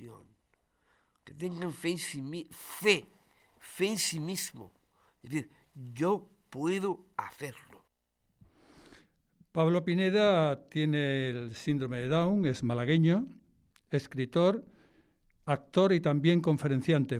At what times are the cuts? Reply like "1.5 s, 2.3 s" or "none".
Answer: none